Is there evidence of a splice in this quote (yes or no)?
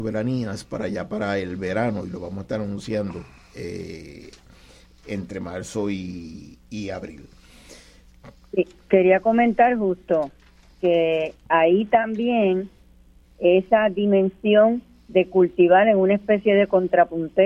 yes